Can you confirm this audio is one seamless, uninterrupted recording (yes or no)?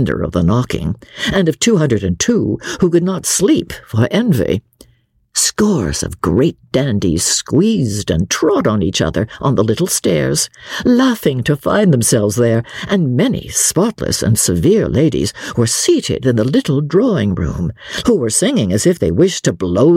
no